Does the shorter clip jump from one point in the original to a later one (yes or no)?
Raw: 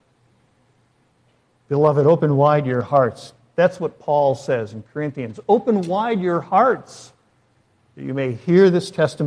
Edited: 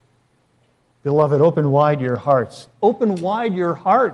yes